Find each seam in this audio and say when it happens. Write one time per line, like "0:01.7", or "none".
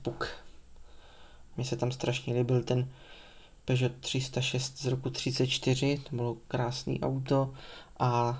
0:01.6